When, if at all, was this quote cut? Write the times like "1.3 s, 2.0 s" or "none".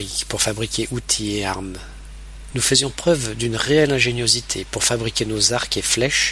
2.5 s